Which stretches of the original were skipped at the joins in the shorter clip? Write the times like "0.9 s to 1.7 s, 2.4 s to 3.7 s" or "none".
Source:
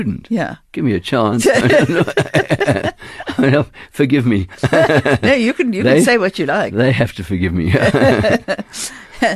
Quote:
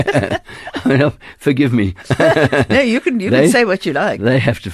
none